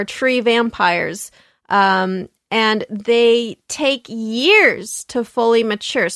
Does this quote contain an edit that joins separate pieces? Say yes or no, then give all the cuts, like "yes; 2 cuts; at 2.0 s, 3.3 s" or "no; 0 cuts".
no; 0 cuts